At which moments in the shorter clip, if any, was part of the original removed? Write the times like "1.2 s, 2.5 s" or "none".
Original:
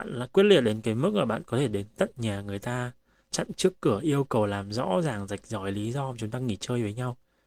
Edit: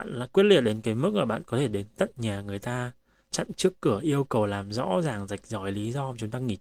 none